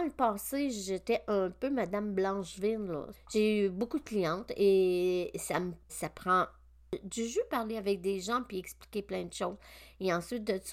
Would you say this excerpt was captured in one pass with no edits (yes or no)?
no